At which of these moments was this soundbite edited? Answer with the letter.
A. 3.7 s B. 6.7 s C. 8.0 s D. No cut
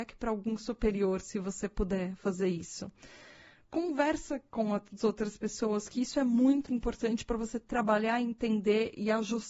B